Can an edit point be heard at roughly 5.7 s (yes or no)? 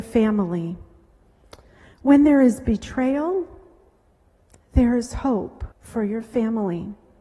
yes